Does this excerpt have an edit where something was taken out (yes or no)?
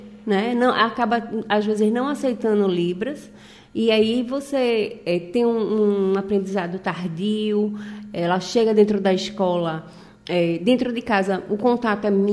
no